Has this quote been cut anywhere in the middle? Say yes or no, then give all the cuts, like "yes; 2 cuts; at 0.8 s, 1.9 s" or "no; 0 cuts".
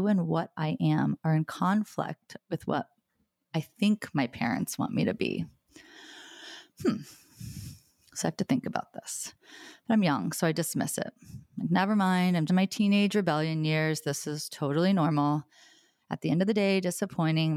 yes; 1 cut; at 12.5 s